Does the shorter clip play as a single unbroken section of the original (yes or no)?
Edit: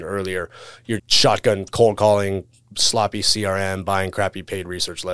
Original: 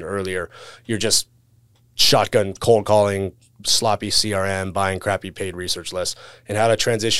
no